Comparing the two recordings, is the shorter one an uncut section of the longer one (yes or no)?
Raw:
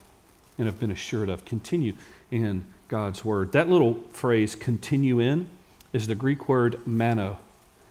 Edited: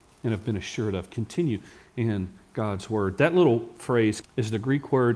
no